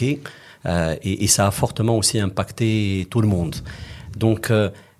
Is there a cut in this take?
no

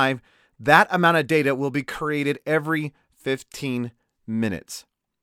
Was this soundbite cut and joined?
no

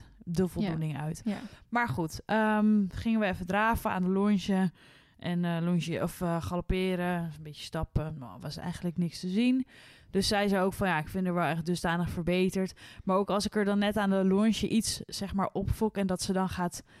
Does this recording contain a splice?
no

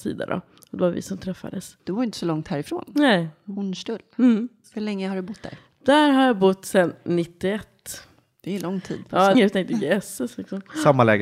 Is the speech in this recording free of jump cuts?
no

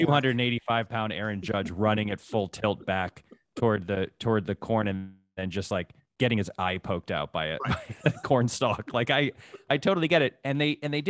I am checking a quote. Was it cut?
no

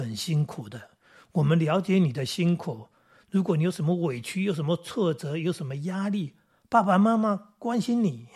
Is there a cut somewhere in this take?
no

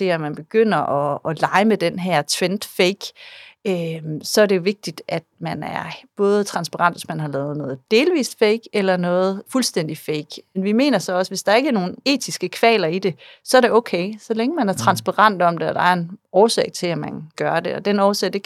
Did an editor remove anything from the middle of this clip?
no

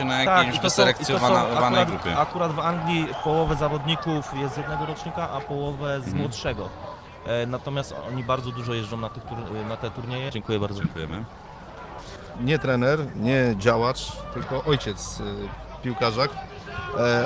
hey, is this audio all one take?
no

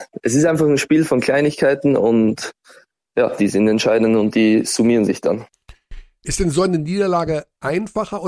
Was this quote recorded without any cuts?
yes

